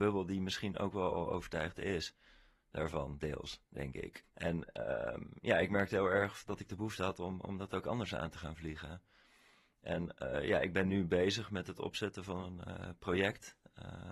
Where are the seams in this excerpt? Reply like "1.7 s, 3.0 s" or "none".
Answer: 4.2 s